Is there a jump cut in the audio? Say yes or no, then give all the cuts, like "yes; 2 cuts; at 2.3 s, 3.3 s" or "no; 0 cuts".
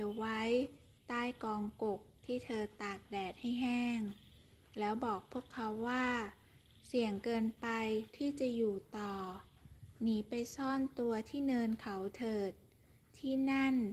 no; 0 cuts